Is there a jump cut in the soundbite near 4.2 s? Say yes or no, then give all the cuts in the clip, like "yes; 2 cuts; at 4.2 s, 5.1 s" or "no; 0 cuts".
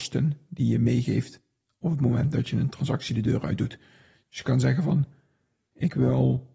no; 0 cuts